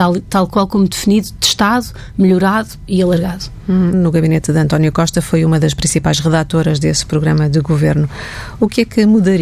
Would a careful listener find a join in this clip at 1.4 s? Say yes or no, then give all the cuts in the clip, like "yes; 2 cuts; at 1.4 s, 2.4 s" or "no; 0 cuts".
no; 1 cut; at 3.9 s